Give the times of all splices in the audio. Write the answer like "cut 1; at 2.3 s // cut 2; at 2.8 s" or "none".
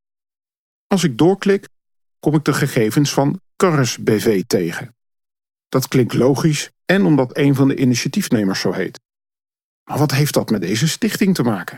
cut 1; at 6.7 s